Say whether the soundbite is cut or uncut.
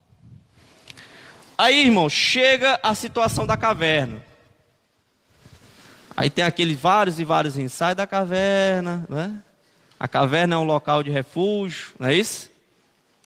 uncut